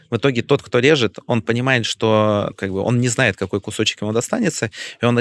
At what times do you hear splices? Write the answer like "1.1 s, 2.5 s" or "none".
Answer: 2.5 s